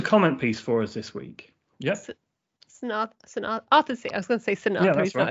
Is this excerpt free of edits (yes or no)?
no